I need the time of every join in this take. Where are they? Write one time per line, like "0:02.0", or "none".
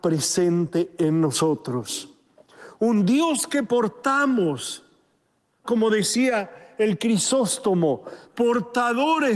0:05.6
0:08.2